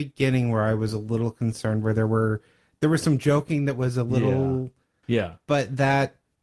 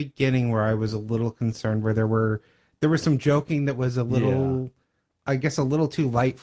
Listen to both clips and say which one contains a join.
first; 1 cut; at 5.0 s

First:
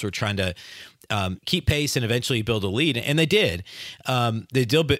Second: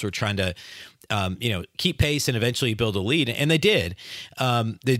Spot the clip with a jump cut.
first; 1 cut; at 1.4 s

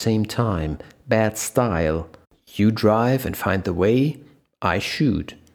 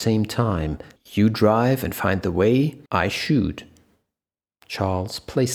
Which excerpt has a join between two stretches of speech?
second; 2 cuts; at 1.0 s, 2.9 s

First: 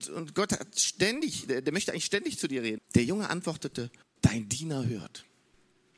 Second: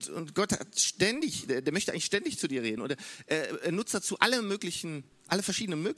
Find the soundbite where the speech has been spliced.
first; 2 cuts; at 2.8 s, 4.0 s

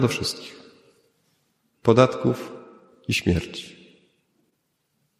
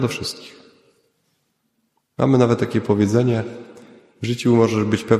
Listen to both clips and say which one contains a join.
first; 1 cut; at 1.7 s

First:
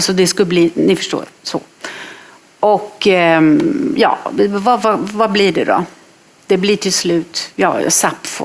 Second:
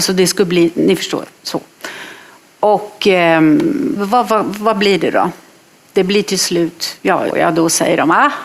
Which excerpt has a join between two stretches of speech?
second; 2 cuts; at 4.0 s, 7.3 s

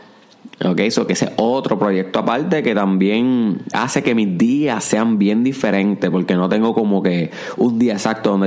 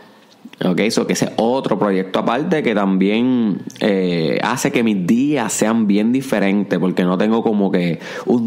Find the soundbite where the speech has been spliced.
first; 1 cut; at 3.7 s

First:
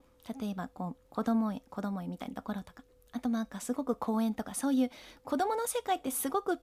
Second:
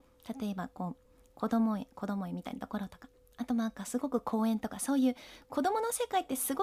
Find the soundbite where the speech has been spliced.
first; 1 cut; at 1.1 s

